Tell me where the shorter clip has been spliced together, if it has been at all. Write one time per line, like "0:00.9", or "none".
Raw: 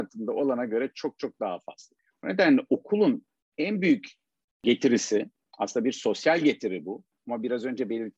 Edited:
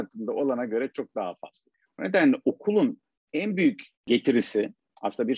0:00.9
0:03.9

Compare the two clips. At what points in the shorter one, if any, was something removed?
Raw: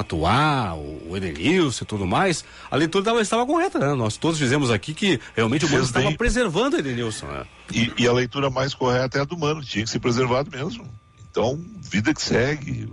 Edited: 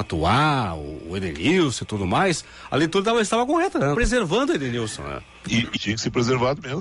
0:03.9
0:05.8

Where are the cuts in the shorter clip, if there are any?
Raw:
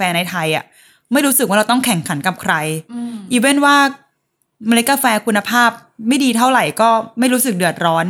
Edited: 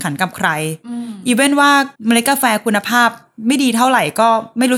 0:01.9

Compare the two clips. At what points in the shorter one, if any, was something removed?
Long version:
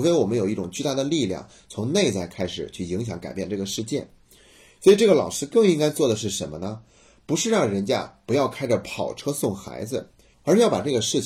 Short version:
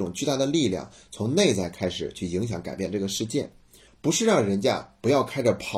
0:03.9

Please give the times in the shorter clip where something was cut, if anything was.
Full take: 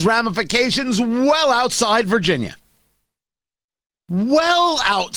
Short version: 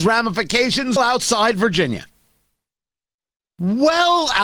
0:01.0

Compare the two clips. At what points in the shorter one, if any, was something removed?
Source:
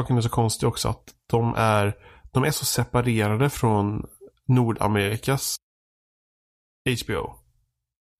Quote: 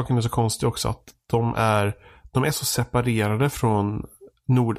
none

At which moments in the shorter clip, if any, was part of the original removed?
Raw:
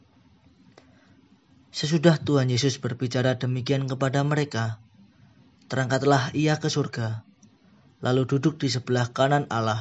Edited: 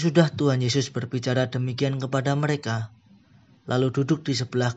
0:03.6

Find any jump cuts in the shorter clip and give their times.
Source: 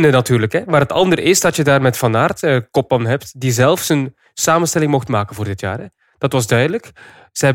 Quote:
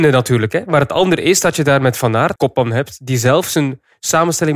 0:02.4

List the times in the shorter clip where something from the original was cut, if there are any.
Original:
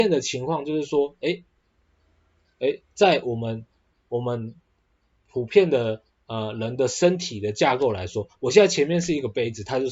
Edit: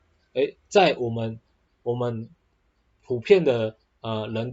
none

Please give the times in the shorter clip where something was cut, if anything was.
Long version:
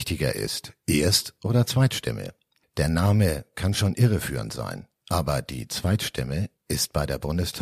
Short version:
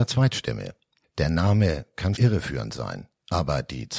0:02.2

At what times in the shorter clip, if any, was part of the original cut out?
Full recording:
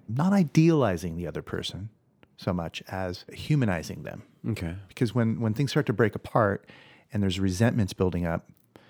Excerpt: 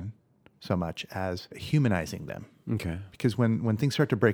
none

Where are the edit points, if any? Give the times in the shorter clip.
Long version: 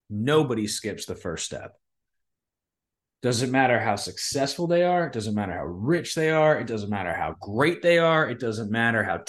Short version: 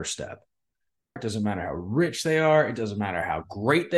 0:01.2

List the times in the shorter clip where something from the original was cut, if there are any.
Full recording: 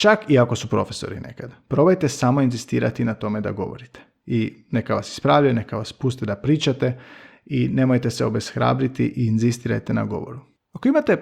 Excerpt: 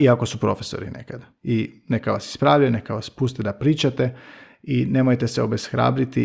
0:01.3

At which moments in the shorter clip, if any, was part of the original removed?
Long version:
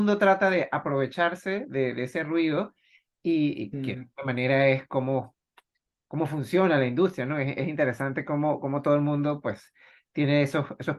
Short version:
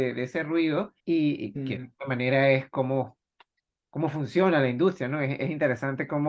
0:01.0

